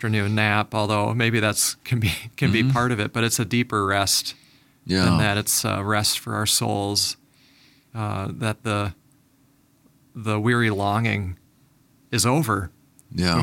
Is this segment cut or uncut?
uncut